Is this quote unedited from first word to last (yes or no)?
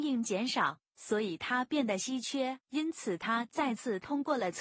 no